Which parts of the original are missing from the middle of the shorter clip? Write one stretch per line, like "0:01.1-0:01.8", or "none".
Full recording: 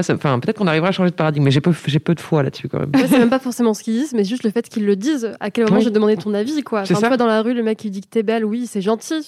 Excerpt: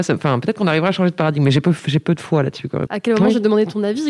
0:02.9-0:05.4